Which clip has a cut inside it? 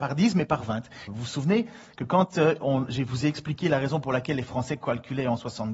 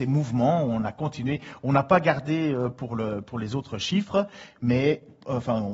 first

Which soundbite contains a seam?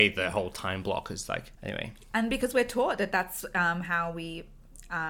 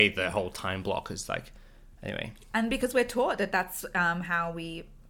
first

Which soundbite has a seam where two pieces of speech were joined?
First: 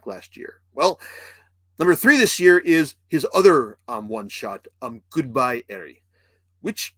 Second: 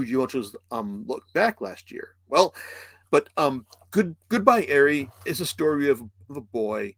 second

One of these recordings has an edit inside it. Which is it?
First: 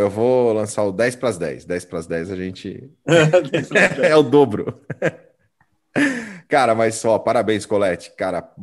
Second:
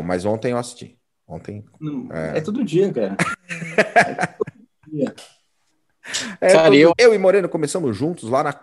second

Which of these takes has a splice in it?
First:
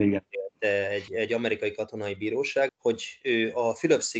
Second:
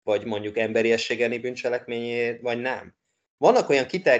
first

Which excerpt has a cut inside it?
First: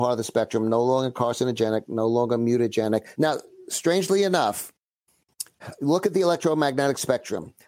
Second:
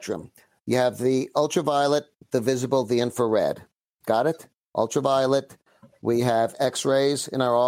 first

